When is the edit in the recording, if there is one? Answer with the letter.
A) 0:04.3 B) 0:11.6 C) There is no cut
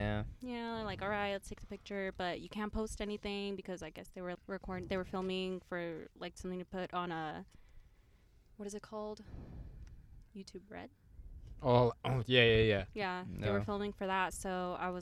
A